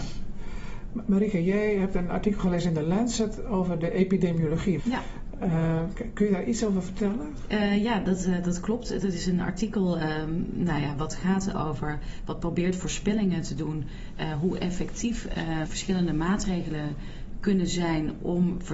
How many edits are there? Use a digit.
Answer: 2